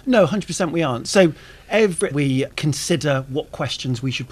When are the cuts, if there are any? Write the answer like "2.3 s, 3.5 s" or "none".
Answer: 2.1 s